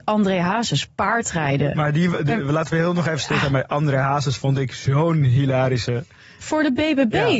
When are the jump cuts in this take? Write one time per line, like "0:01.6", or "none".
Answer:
none